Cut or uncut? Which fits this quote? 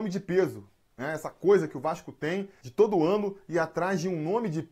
uncut